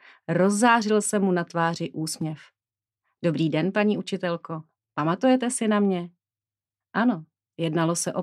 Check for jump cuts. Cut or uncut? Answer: uncut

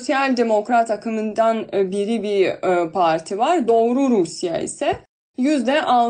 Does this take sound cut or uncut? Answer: uncut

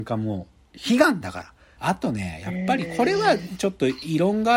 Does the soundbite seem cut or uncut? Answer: cut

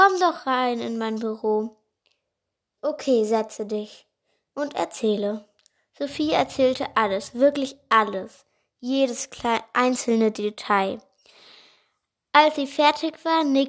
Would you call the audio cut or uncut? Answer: cut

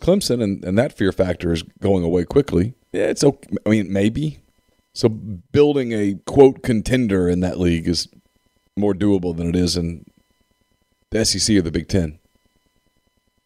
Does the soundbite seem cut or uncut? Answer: cut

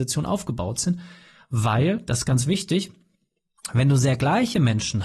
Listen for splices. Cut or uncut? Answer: uncut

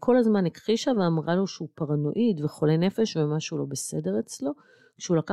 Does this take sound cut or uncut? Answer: uncut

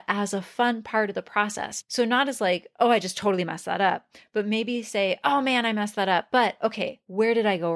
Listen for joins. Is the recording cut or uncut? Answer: uncut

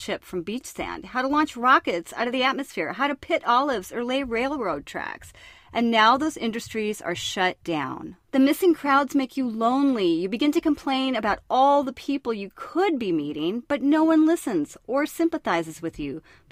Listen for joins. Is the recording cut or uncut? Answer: uncut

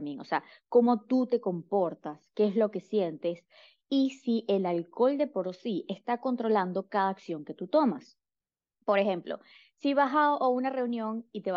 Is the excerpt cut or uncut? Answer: uncut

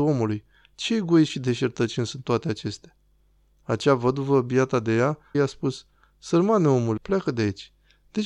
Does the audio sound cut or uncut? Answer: cut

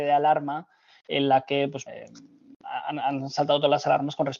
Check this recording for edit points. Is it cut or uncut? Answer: cut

